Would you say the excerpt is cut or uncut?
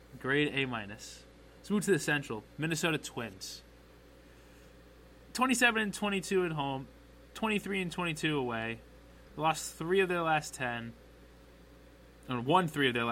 uncut